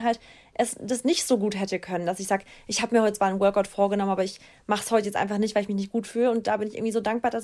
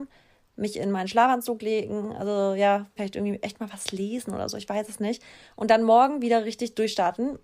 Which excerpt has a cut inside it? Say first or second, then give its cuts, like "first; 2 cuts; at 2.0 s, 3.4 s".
second; 1 cut; at 3.0 s